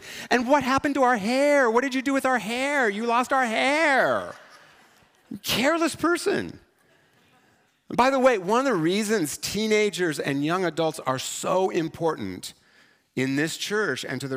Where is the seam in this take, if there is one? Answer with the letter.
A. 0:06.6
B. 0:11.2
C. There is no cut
C